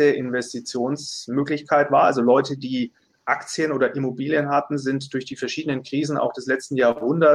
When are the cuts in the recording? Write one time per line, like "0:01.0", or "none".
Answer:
none